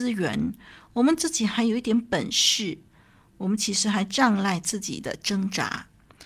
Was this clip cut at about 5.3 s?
no; 1 cut; at 3.3 s

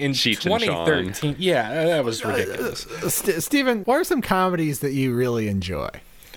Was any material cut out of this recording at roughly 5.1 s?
no; 1 cut; at 3.8 s

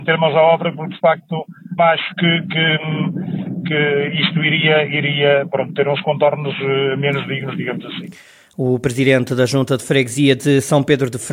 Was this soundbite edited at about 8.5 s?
no; 1 cut; at 1.8 s

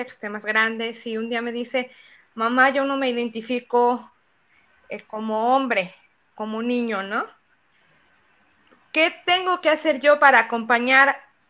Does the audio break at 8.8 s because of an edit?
no; 0 cuts

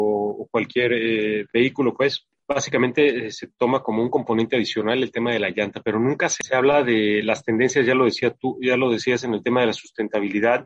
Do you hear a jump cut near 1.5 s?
no; 0 cuts

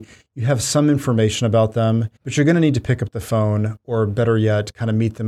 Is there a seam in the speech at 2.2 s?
yes; 1 cut; at 2.2 s

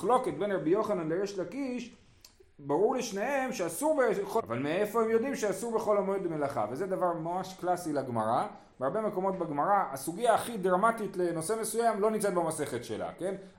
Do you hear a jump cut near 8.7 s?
no; 1 cut; at 4.4 s

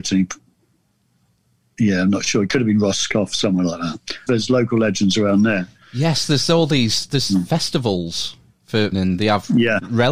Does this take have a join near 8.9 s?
yes; 2 cuts; at 4.3 s, 8.9 s

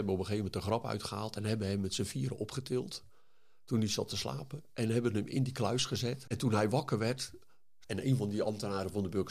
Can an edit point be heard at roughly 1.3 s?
no; 2 cuts; at 6.2 s, 7.8 s

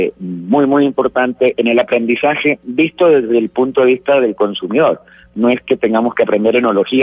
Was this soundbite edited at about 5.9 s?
no; 0 cuts

